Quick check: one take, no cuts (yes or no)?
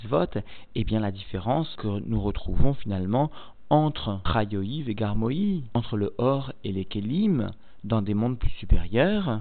yes